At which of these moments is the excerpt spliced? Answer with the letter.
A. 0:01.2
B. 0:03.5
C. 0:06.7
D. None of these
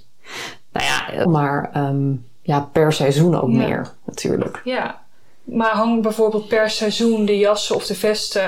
A